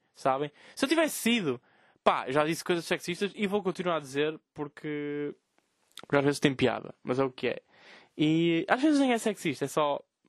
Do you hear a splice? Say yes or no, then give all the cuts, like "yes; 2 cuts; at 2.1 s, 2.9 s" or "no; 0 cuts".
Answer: no; 0 cuts